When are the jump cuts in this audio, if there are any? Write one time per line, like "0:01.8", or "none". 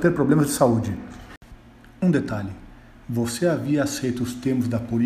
none